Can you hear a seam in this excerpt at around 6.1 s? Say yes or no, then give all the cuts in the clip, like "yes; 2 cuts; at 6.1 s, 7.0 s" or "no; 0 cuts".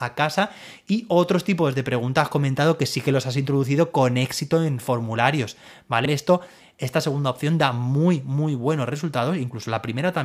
yes; 1 cut; at 6.1 s